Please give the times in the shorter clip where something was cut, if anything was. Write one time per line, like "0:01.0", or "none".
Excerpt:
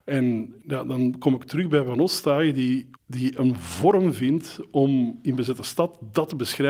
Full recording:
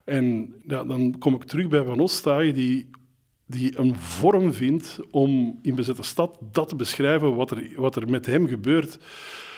0:03.0